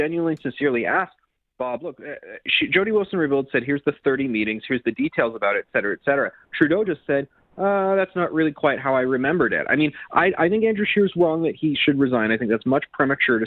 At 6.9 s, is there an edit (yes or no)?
no